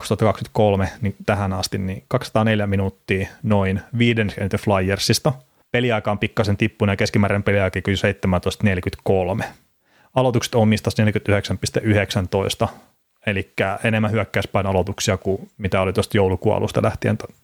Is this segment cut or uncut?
cut